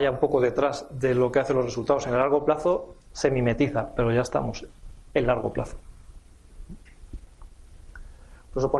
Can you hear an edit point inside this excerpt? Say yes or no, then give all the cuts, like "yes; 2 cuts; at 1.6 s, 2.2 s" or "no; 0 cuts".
yes; 1 cut; at 3.0 s